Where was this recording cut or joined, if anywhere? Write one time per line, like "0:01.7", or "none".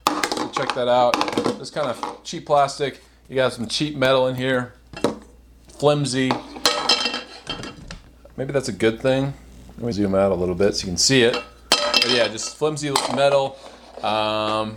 0:09.9